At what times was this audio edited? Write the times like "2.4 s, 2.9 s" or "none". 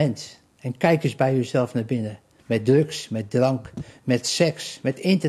2.4 s